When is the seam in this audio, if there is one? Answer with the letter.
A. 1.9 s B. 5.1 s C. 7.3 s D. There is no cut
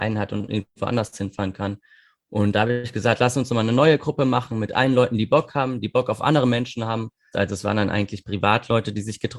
C